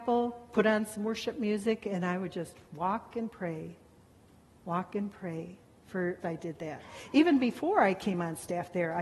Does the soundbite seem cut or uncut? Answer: cut